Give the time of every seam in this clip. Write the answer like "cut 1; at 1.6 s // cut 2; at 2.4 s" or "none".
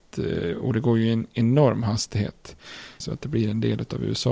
cut 1; at 3.0 s